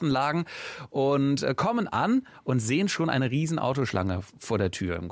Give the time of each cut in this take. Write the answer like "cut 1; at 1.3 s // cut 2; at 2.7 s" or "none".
none